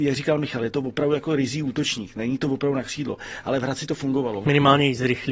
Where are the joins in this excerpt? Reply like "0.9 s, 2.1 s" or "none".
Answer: 4.4 s